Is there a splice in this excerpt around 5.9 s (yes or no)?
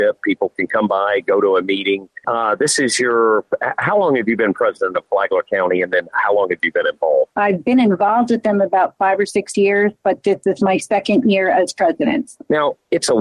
no